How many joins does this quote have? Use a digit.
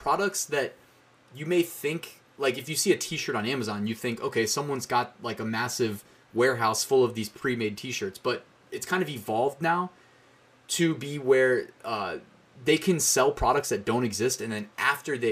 0